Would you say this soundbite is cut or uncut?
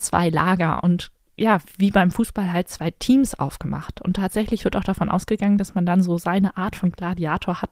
uncut